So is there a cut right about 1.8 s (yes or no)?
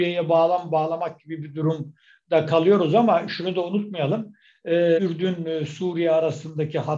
no